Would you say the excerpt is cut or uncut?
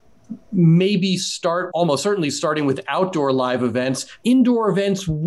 cut